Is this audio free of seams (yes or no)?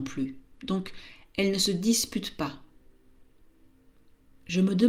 yes